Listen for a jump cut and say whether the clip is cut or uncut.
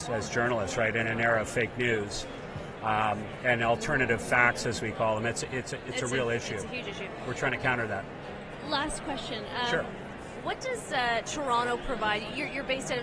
uncut